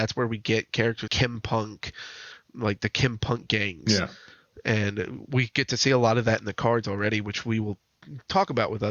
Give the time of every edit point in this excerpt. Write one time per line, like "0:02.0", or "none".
0:01.1